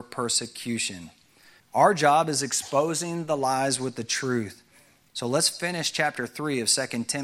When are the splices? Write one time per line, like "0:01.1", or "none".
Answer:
0:01.6
0:05.1